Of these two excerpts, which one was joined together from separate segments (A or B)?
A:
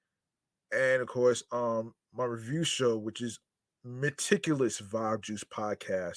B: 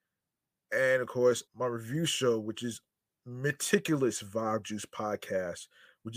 B